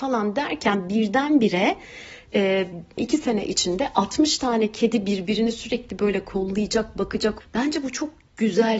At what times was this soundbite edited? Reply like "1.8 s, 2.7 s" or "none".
3.0 s, 7.4 s